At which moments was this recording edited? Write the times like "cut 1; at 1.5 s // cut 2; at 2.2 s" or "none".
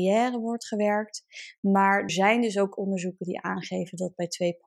cut 1; at 2.1 s